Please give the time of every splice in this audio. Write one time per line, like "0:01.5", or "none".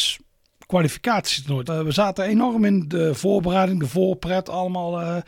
0:01.7